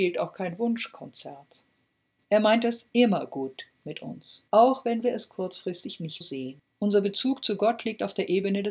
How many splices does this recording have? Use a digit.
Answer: 3